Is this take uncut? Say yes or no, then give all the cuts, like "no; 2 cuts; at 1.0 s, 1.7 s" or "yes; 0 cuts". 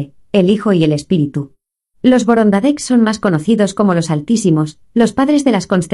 no; 1 cut; at 1.9 s